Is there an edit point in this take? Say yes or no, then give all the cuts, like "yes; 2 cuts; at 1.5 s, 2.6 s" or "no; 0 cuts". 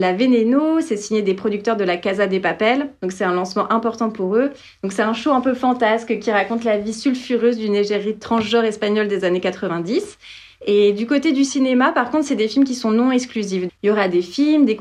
yes; 1 cut; at 13.7 s